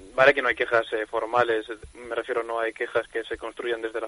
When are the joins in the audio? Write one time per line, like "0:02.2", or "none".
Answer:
none

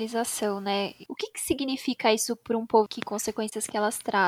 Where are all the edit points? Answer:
0:01.1
0:02.9

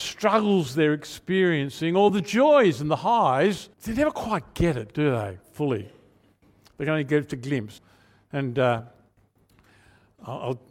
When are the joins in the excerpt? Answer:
0:03.7
0:07.8

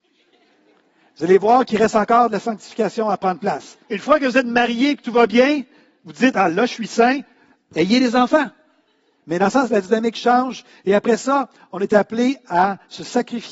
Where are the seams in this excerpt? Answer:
0:03.8
0:09.2

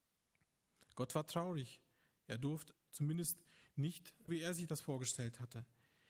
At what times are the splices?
0:02.7
0:04.3

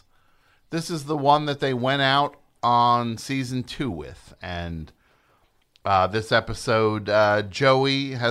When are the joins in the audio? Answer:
none

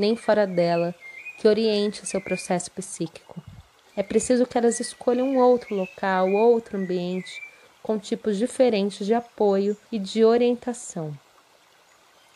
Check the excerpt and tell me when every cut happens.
0:03.8
0:09.8

